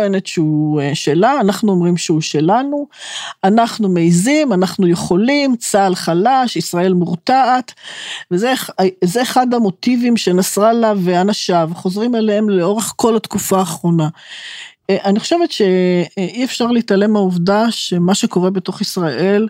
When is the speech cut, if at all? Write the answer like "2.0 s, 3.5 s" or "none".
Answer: none